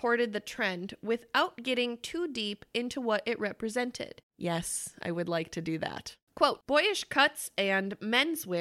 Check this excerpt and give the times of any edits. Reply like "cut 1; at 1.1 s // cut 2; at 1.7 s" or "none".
cut 1; at 4.2 s